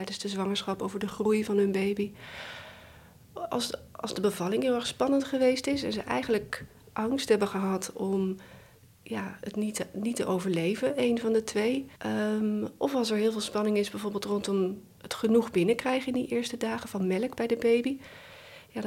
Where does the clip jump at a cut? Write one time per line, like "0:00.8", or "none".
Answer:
0:12.0
0:14.9